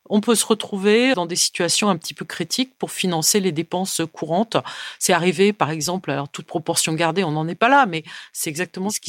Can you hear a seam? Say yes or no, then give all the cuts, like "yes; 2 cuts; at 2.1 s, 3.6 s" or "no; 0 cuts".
yes; 1 cut; at 1.1 s